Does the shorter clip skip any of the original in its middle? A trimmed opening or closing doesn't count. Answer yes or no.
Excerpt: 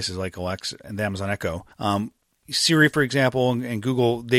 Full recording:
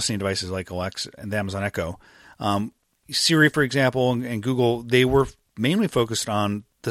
yes